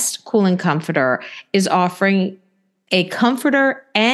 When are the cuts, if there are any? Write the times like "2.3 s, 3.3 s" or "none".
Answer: none